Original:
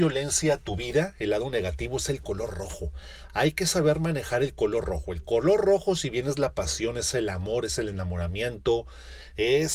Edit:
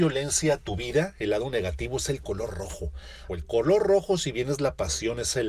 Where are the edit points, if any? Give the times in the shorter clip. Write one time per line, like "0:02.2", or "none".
0:03.3